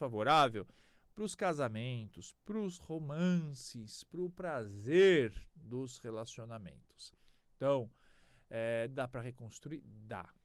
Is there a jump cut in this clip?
no; 0 cuts

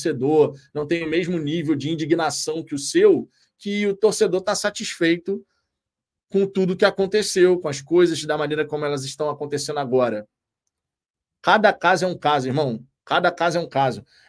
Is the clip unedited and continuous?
yes; 0 cuts

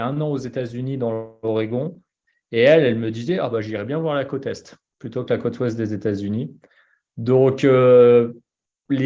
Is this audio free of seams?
yes; 0 cuts

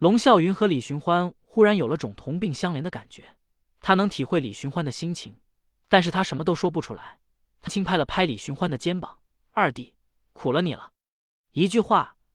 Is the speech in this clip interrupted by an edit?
yes; 1 cut; at 7.7 s

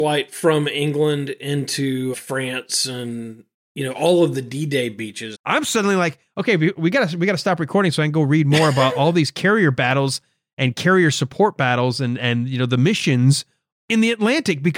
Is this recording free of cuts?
no; 2 cuts; at 2.1 s, 5.3 s

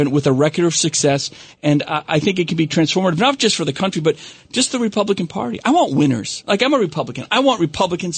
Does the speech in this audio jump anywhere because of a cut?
no; 0 cuts

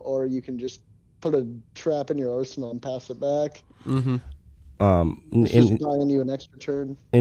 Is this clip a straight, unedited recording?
yes; 0 cuts

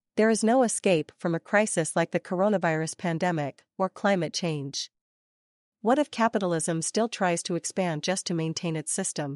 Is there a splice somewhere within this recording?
no; 0 cuts

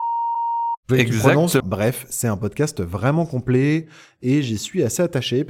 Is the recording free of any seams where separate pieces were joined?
no; 1 cut; at 1.6 s

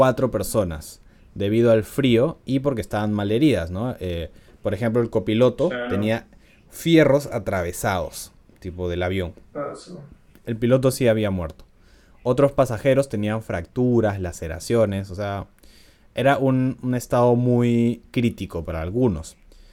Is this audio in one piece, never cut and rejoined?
yes; 0 cuts

